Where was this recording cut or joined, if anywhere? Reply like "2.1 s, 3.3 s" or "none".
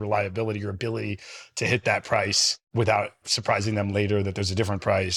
3.2 s